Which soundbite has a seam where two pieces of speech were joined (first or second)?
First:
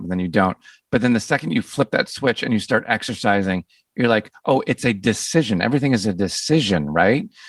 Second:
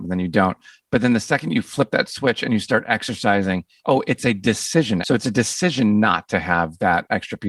second